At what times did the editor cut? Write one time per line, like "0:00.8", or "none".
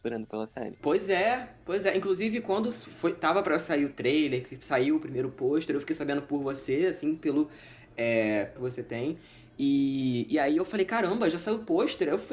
0:08.6